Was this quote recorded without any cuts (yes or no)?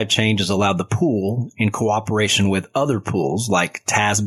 yes